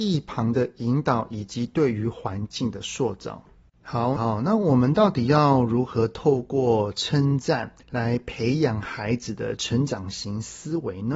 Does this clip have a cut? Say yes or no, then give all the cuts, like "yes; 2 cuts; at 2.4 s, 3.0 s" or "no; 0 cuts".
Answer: yes; 2 cuts; at 4.2 s, 7.8 s